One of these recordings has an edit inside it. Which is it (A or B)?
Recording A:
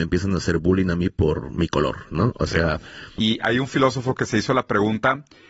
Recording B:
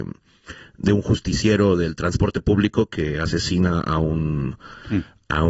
A